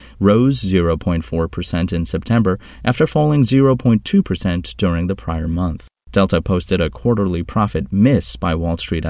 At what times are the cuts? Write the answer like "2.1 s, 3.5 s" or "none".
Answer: 6.1 s